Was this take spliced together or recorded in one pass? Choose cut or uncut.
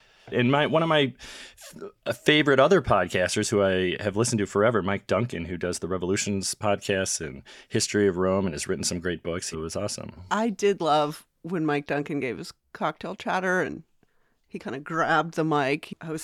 cut